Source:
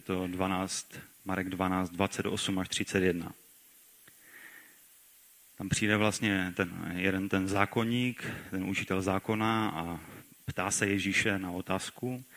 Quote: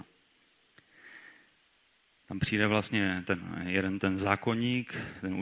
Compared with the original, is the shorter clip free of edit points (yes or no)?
yes